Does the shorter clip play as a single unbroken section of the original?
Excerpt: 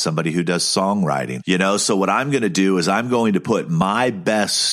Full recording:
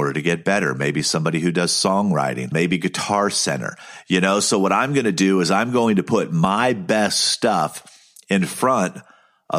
no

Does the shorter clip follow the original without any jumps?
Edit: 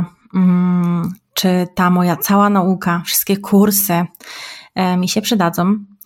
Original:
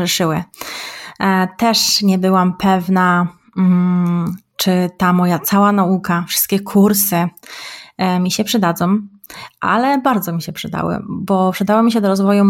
yes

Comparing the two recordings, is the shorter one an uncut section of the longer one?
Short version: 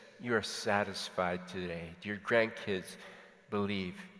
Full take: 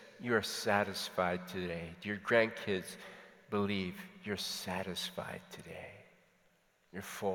yes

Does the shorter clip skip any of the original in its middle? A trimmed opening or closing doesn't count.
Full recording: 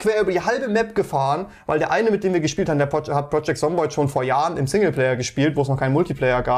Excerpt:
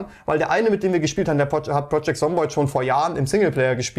no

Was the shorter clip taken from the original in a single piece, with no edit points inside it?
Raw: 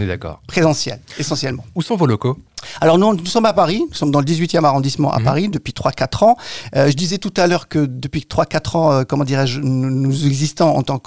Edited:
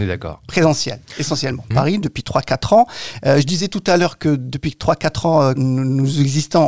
no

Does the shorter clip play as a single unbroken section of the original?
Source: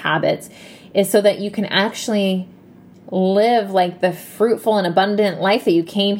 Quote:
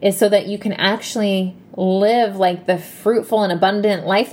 no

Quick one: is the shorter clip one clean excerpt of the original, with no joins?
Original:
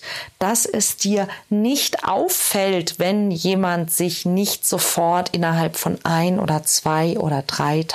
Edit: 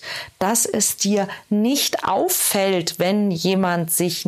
yes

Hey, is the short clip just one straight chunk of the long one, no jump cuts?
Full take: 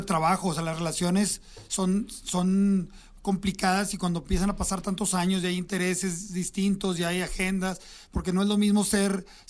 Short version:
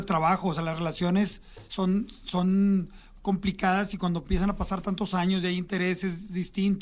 yes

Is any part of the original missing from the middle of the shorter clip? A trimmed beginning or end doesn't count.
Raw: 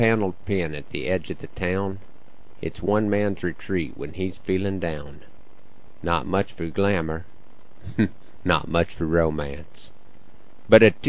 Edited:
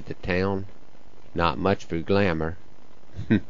yes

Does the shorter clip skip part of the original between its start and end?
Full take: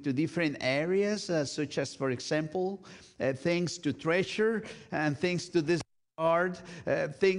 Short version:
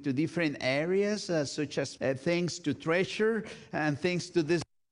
yes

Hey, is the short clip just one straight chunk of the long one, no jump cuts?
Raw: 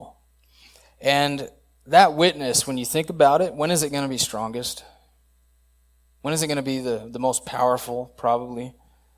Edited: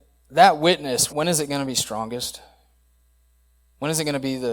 no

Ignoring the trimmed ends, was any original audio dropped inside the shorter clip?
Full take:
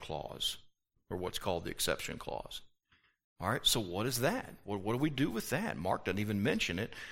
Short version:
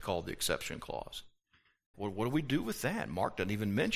yes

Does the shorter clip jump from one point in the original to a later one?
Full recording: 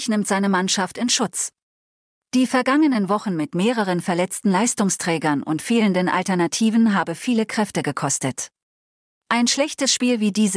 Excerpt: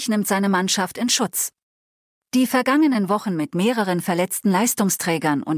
no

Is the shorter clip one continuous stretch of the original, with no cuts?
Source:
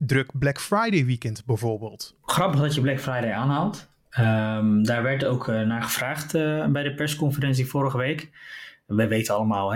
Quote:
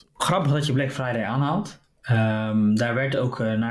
yes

